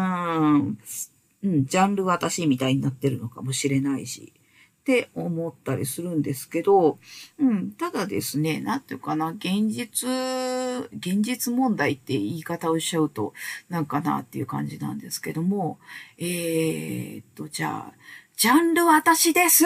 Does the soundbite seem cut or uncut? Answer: uncut